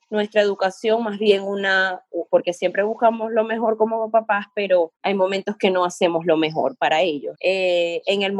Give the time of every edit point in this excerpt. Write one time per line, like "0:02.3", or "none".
0:02.3
0:05.0
0:07.3